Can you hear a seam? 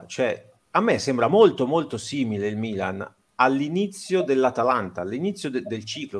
no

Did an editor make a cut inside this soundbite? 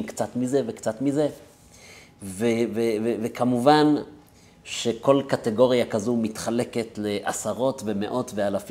no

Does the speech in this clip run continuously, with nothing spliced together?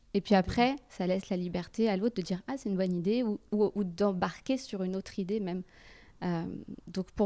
yes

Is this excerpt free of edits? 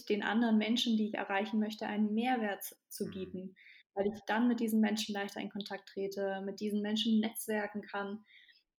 yes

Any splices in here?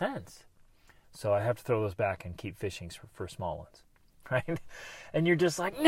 yes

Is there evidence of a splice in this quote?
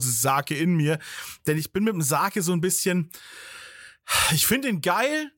no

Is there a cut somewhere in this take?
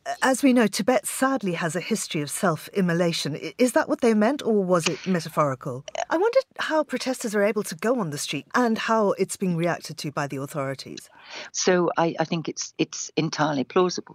yes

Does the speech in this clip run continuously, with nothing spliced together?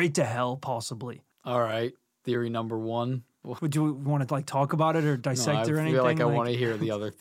no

